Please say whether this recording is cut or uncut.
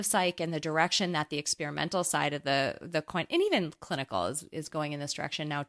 uncut